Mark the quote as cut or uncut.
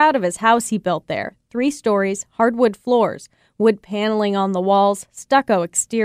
uncut